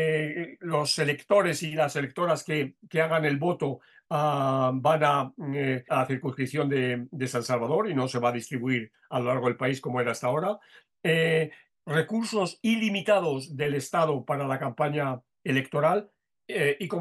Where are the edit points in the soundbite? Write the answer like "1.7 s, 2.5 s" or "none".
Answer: 5.9 s